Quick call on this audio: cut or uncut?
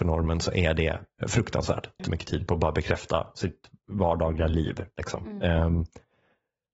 cut